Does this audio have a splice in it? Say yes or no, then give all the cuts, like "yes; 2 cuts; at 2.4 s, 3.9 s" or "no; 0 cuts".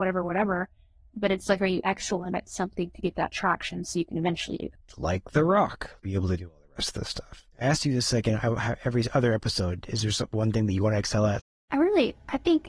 yes; 1 cut; at 6.0 s